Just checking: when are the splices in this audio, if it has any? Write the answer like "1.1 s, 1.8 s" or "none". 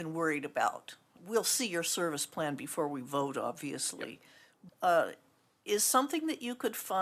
1.2 s, 4.7 s